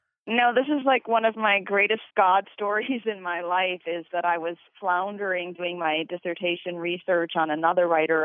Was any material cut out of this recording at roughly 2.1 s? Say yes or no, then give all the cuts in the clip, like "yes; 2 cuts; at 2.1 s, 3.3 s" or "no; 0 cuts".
yes; 1 cut; at 2.1 s